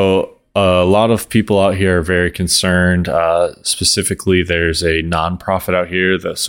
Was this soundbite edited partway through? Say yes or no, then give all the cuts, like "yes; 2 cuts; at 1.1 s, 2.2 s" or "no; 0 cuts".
no; 0 cuts